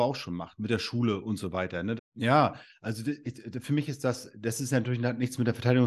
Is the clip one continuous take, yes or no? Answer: no